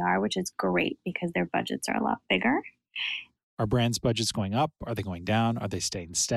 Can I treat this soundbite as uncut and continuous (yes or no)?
no